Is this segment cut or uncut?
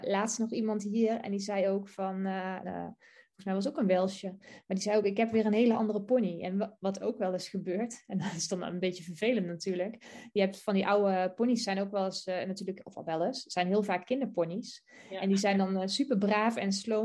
cut